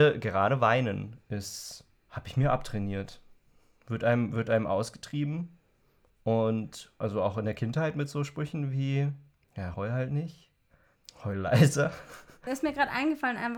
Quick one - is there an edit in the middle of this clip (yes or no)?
yes